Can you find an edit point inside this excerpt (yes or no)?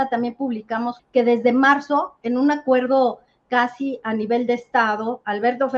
yes